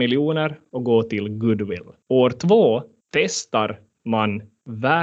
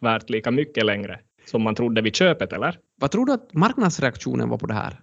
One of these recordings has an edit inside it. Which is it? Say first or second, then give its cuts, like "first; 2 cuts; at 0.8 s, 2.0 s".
second; 1 cut; at 2.9 s